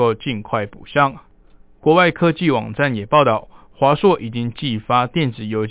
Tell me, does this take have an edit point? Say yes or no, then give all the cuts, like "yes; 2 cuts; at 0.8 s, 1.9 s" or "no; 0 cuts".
yes; 1 cut; at 1.8 s